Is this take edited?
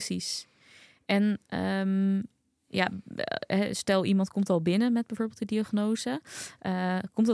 no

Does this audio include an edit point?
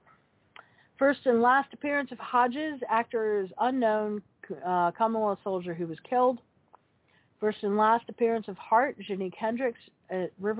no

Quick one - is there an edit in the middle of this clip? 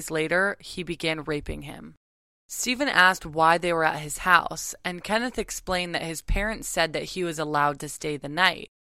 yes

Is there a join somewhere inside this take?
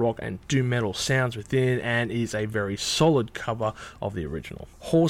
no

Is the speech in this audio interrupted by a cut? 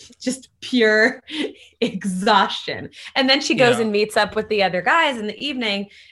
no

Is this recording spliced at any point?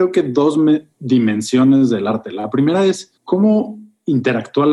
yes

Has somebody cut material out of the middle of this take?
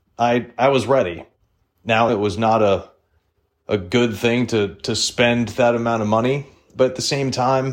yes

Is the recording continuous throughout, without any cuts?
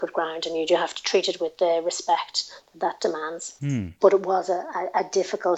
no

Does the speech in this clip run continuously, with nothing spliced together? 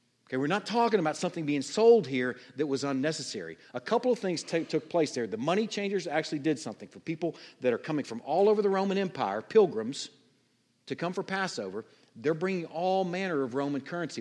yes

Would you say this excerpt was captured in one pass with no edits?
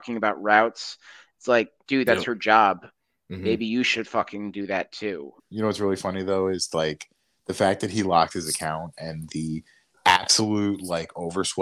yes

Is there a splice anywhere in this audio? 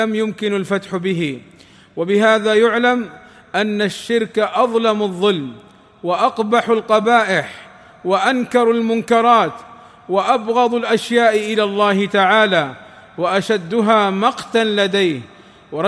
no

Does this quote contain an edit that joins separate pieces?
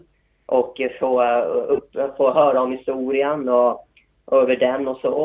no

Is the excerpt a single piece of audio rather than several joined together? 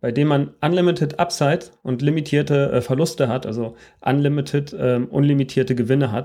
yes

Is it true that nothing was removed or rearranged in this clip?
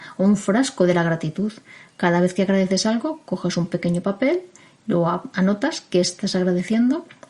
yes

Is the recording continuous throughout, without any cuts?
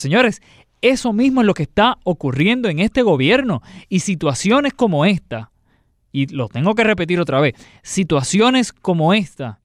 yes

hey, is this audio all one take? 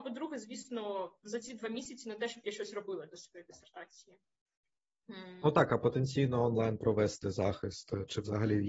yes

